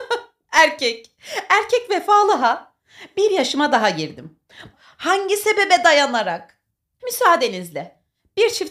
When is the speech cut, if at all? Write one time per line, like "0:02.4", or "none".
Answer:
0:04.7
0:07.0

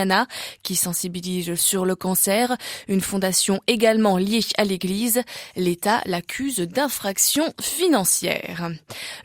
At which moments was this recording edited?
none

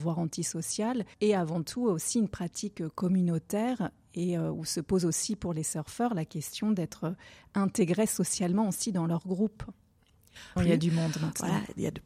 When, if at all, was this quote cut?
0:01.1
0:10.6

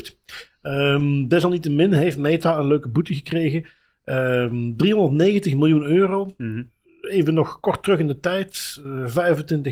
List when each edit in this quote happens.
none

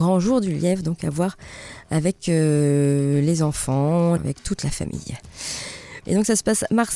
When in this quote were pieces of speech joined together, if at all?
0:04.2
0:06.0

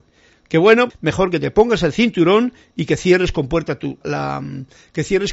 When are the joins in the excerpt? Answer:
0:00.9
0:04.0

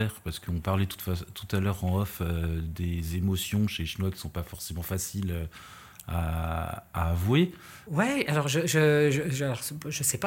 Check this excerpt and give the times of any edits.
0:07.9

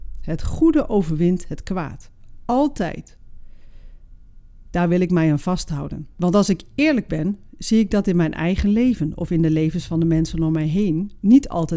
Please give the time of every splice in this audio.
none

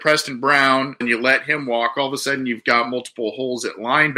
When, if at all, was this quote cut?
0:01.0

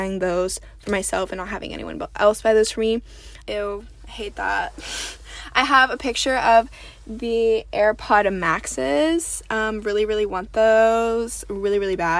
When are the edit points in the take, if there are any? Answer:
0:03.4

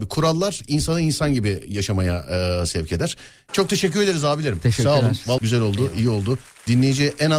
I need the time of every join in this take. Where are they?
0:03.5
0:05.4

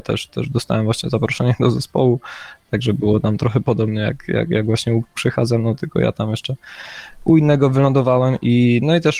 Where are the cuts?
none

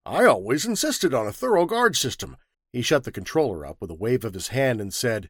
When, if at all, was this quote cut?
0:02.5

